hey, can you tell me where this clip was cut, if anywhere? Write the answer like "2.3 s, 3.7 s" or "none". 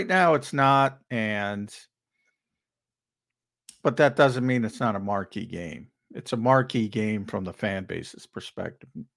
none

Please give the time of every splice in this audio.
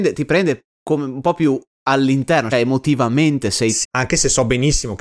2.5 s, 3.8 s

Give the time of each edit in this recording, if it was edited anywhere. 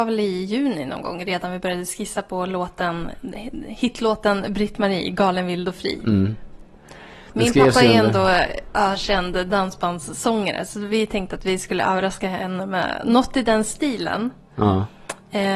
none

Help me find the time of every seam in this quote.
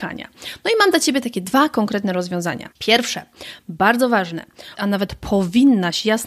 2.7 s, 4.8 s

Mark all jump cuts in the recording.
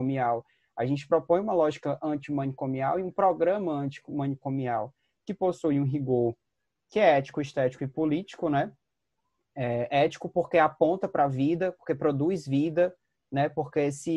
none

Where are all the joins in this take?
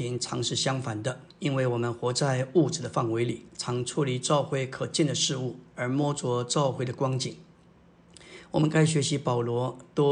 1.3 s

